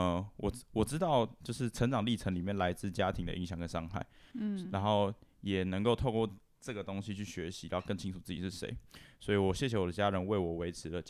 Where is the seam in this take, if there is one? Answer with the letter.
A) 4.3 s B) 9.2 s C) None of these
A